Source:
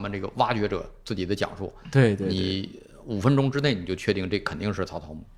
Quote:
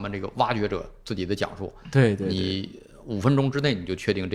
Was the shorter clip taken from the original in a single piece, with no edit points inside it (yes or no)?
yes